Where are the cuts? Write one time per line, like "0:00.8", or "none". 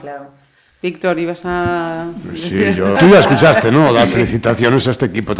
0:02.9